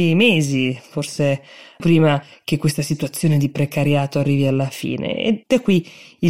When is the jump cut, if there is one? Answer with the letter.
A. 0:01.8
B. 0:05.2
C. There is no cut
A